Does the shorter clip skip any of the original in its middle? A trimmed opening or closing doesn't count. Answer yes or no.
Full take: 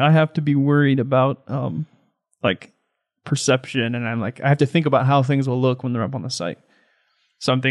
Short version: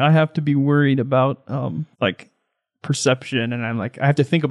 yes